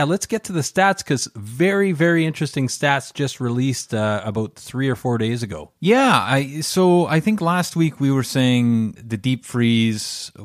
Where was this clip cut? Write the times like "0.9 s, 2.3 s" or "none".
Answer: 5.8 s, 9.0 s